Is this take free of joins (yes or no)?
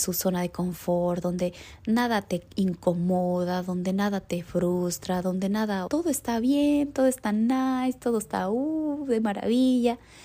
no